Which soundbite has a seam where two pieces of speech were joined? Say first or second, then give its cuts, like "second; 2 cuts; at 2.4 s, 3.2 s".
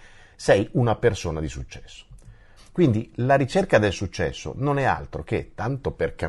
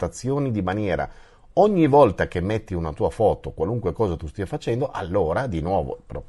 first; 1 cut; at 2.6 s